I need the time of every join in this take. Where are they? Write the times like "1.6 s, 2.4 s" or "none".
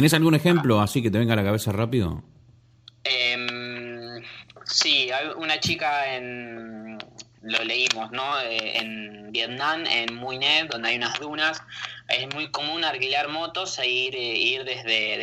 none